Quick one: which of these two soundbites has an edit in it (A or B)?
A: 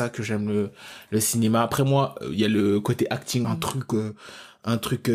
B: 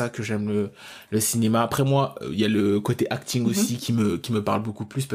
A